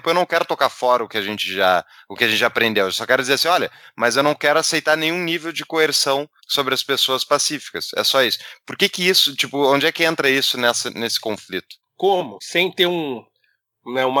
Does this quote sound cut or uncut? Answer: cut